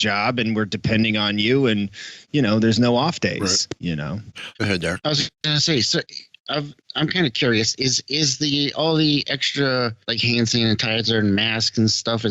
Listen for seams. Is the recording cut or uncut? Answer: cut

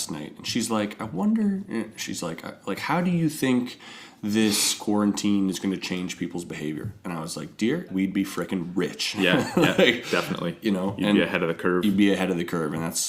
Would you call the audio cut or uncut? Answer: cut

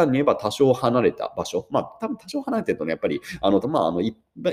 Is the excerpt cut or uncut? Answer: cut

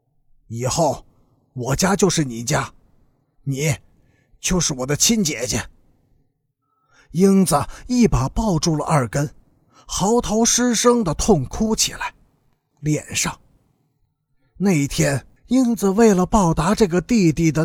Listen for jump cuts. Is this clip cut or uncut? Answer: cut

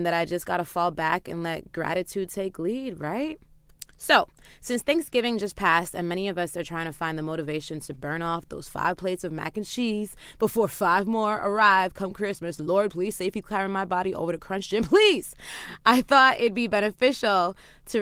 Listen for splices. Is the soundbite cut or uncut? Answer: cut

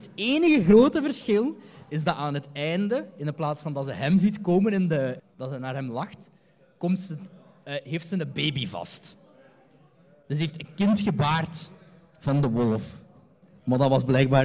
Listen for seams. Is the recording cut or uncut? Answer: cut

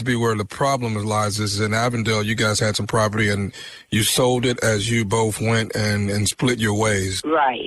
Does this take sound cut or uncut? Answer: uncut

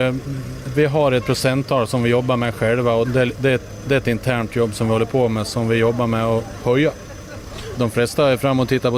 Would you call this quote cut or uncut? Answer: cut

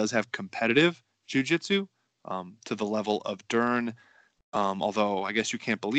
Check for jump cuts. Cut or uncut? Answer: cut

